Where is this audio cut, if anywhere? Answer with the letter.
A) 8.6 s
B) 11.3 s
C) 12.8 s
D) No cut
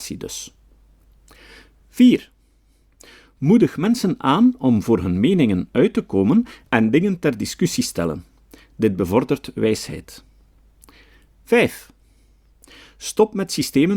D